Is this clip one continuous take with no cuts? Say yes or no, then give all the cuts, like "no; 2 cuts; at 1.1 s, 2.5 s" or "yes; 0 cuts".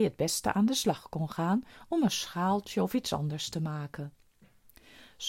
yes; 0 cuts